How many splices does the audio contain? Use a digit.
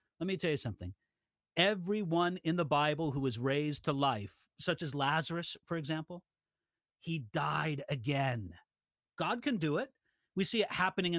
1